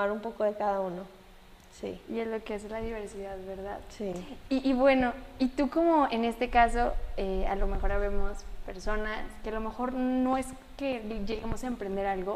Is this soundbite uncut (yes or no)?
yes